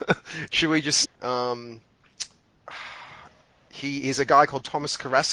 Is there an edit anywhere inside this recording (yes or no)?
yes